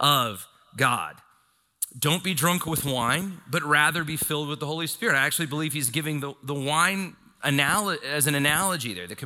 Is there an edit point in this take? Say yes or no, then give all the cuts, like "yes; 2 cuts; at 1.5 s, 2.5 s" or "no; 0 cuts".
no; 0 cuts